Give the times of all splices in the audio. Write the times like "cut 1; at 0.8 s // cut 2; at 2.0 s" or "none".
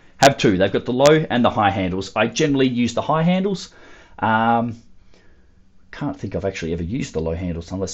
none